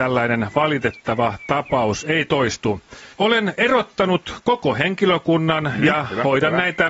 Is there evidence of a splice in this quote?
yes; 1 cut; at 3.1 s

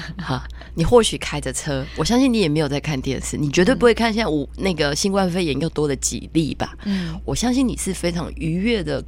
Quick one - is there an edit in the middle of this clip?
no; 0 cuts

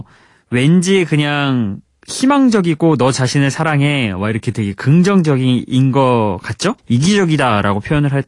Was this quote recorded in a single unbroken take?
no; 1 cut; at 6.8 s

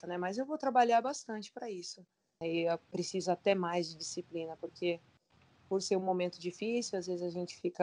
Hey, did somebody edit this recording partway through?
yes; 1 cut; at 2.4 s

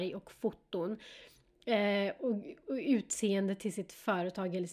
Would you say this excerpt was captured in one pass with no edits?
yes; 0 cuts

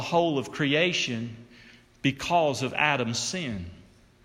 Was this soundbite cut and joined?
no; 0 cuts

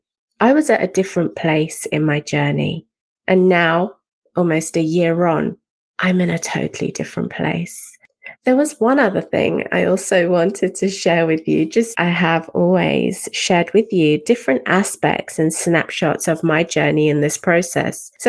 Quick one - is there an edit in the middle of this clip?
yes; 2 cuts; at 8.4 s, 11.9 s

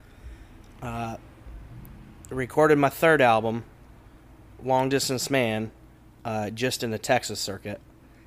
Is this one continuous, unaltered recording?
no; 1 cut; at 6.2 s

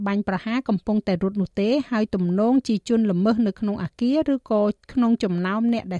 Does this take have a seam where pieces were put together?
yes; 1 cut; at 4.8 s

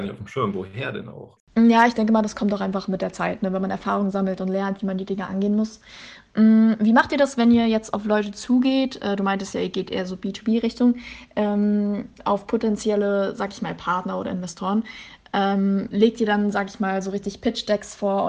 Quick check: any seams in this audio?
no; 0 cuts

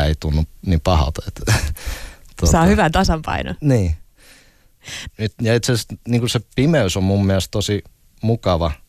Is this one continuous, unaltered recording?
no; 1 cut; at 5.1 s

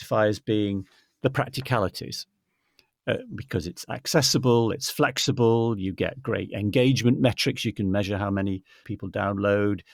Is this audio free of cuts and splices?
yes; 0 cuts

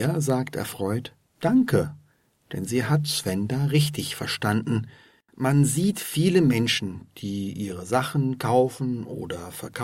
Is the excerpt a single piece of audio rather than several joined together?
no; 1 cut; at 5.3 s

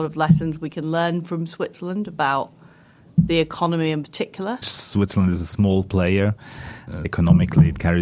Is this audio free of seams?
no; 2 cuts; at 4.6 s, 7.0 s

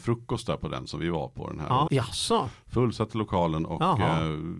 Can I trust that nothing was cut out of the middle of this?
no; 1 cut; at 1.9 s

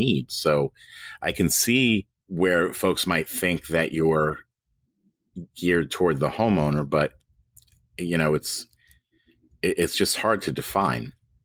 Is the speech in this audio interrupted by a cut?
no; 0 cuts

